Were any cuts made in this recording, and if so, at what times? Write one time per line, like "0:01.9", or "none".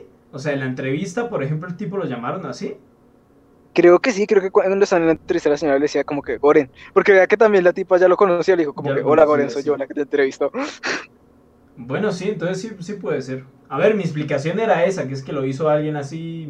none